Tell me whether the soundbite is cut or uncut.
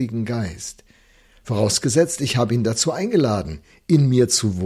uncut